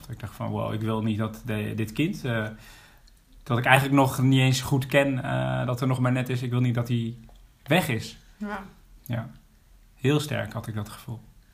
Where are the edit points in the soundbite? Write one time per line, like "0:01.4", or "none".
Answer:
none